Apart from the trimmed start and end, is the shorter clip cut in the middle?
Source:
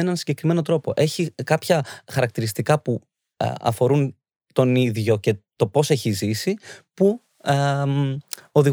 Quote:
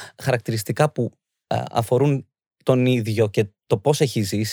no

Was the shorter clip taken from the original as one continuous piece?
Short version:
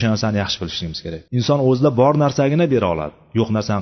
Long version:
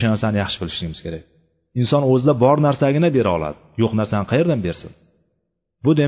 no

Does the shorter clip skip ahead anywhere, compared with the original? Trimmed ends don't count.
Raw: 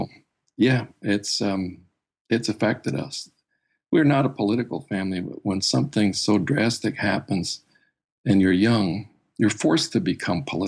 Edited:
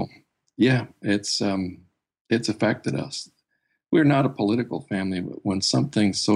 no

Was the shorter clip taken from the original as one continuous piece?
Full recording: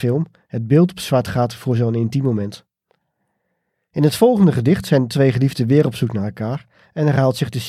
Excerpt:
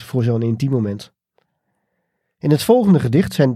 yes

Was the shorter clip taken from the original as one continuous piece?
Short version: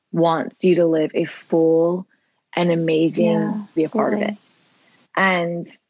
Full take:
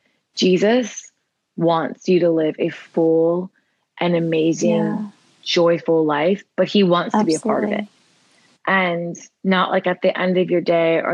no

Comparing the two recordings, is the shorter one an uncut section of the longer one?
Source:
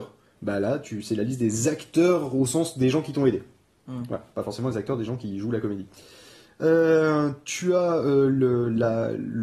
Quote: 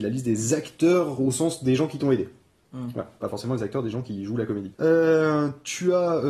no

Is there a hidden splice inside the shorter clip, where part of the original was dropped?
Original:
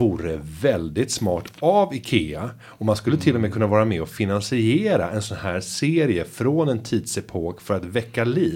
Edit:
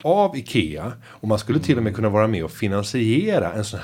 no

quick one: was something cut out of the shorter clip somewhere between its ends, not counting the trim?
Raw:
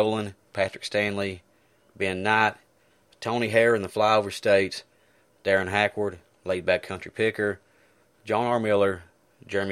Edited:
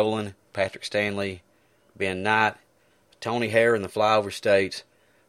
no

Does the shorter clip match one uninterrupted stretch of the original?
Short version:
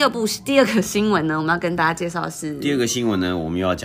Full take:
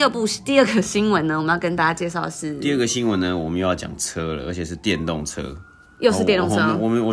yes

